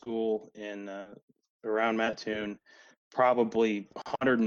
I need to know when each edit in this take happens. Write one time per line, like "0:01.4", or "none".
none